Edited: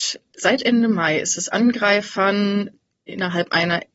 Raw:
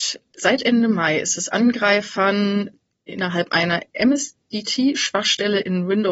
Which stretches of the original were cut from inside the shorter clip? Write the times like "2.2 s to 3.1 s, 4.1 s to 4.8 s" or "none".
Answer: none